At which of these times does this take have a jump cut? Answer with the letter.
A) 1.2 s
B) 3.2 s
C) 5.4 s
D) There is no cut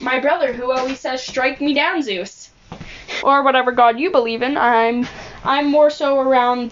B